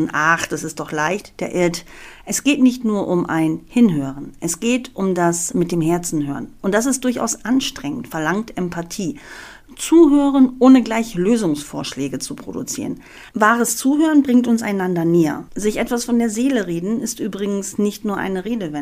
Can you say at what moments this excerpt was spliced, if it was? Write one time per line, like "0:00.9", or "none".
0:13.3
0:15.5